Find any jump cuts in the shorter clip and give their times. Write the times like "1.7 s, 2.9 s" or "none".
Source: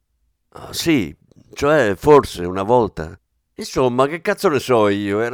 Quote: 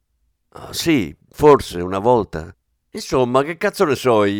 1.3 s